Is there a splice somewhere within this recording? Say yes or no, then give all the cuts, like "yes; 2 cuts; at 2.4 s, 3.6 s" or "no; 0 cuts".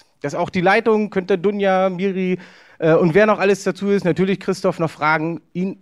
no; 0 cuts